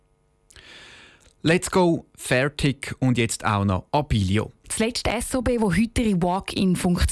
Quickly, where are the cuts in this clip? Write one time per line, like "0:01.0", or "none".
0:04.6